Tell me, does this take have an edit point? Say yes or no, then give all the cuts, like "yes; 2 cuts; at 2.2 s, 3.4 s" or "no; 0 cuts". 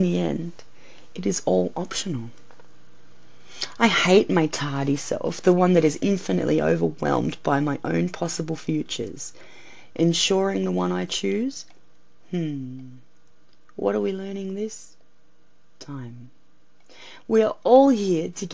no; 0 cuts